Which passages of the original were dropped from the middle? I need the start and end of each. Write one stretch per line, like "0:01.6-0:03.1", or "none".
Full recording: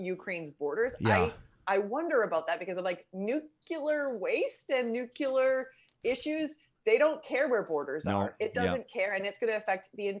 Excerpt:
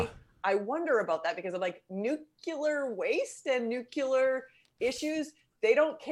none